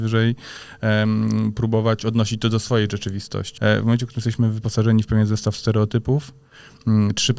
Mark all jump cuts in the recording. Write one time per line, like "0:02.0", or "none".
0:03.6